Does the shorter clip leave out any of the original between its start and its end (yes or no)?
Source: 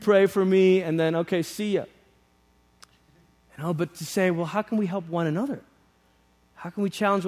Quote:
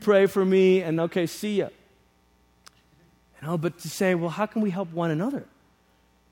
yes